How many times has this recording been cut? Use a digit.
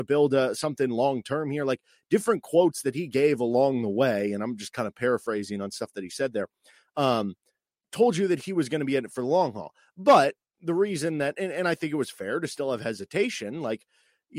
0